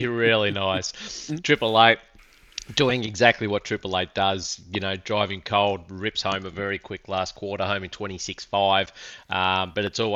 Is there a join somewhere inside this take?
no; 0 cuts

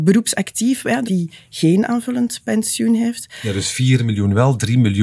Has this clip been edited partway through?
yes; 1 cut; at 1.0 s

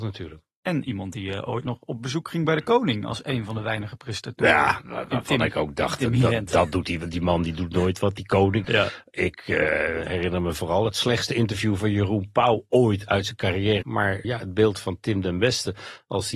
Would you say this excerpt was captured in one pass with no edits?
no; 2 cuts; at 8.6 s, 13.8 s

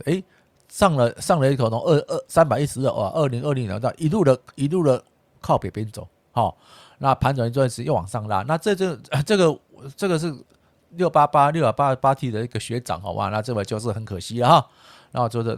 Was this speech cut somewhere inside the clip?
no; 0 cuts

